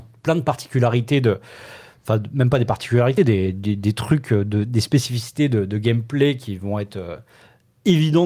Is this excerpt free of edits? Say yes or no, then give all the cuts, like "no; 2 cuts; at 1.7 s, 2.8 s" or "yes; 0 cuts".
yes; 0 cuts